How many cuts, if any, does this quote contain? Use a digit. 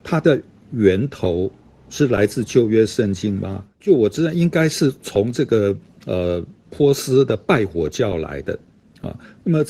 2